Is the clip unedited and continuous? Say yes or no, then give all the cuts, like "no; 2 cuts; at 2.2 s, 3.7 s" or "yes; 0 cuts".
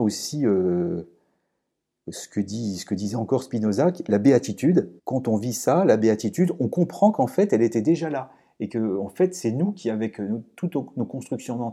no; 1 cut; at 5.0 s